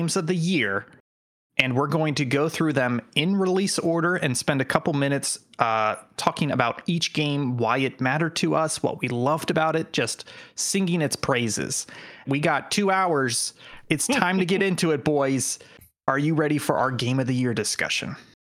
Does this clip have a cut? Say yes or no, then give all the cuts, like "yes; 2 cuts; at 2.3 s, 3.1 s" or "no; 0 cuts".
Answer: yes; 1 cut; at 12.2 s